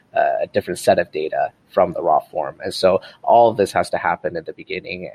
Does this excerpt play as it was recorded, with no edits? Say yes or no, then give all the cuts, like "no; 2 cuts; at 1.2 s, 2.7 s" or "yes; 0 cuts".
yes; 0 cuts